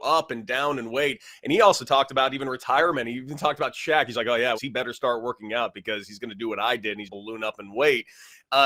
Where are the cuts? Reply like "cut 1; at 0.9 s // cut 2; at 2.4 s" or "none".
cut 1; at 4.5 s // cut 2; at 7.0 s